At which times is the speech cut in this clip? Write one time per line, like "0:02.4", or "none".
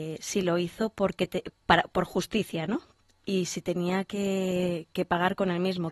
0:01.5